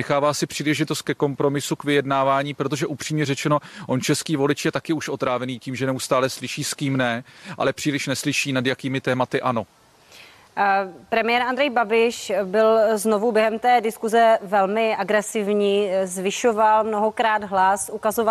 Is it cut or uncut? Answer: uncut